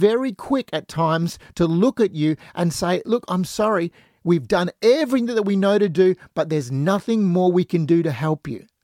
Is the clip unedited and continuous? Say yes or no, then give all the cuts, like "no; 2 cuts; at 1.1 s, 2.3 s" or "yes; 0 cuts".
yes; 0 cuts